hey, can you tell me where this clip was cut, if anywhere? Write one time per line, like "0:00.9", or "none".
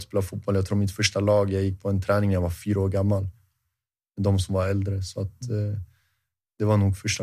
none